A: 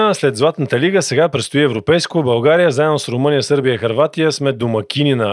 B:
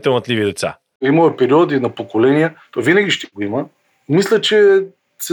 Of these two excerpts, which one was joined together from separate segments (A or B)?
B